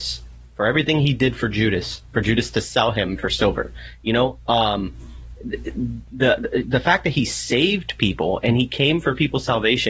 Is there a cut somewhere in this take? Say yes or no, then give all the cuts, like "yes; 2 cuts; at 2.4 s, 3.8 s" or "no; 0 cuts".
no; 0 cuts